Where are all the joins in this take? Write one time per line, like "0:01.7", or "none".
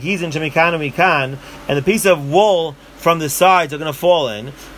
none